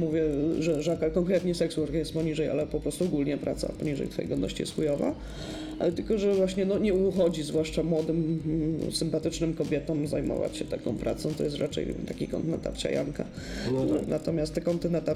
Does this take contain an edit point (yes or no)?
yes